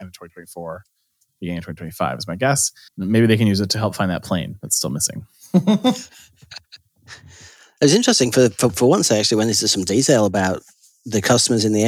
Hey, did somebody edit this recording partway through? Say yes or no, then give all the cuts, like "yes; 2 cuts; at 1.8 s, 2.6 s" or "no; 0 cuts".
yes; 1 cut; at 2.9 s